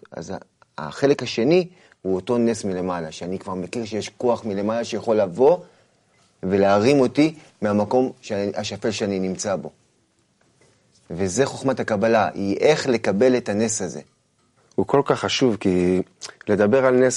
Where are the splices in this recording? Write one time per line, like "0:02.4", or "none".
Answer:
0:14.6